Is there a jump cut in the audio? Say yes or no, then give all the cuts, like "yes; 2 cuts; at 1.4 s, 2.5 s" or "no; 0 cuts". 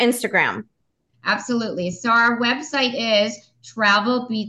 no; 0 cuts